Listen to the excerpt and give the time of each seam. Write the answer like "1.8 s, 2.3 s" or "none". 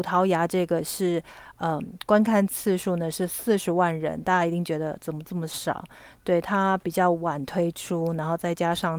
none